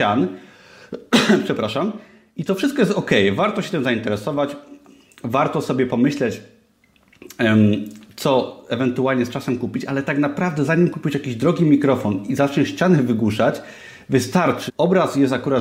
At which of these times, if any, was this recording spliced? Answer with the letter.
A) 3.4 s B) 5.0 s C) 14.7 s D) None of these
C